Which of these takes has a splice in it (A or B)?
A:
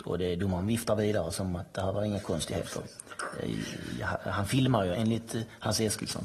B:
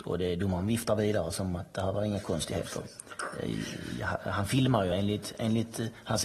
A